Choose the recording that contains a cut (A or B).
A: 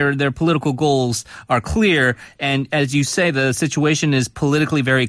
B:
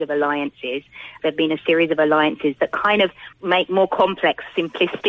B